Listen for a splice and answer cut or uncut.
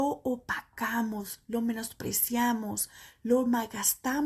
uncut